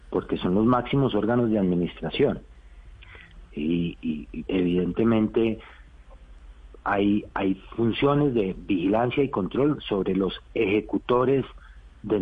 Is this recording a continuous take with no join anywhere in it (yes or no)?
no